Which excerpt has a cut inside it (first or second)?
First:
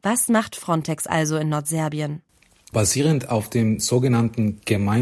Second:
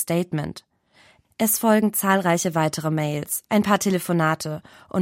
second